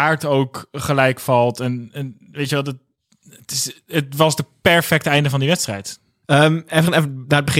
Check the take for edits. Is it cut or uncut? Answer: cut